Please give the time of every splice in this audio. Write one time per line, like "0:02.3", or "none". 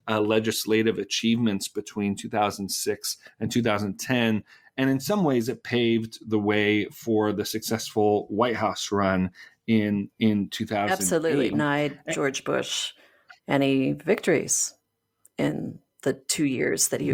0:11.5